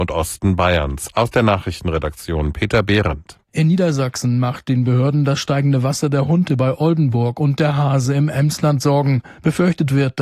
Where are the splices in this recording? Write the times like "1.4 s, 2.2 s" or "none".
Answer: none

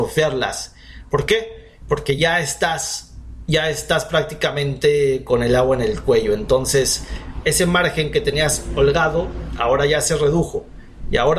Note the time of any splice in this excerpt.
none

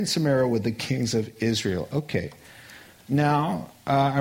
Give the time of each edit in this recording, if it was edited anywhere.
3.0 s

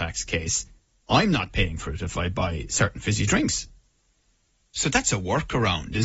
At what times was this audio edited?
4.6 s

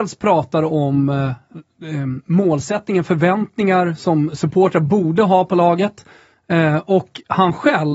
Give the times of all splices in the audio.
none

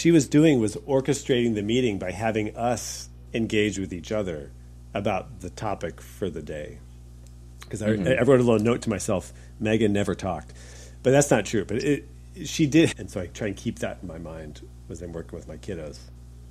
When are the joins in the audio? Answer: 12.9 s

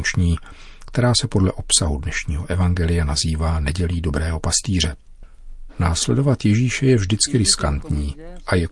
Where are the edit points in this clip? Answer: 5.7 s

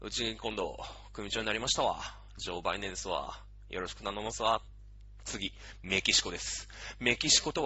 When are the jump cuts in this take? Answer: none

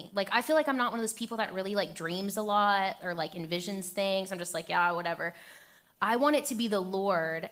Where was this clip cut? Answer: none

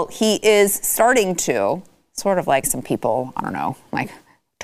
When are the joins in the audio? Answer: 2.6 s

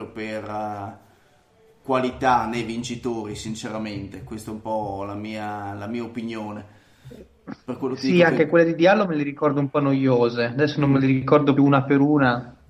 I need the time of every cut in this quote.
11.6 s

